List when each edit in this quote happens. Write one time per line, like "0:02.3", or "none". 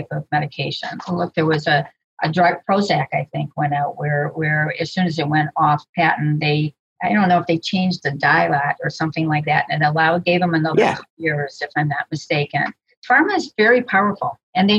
none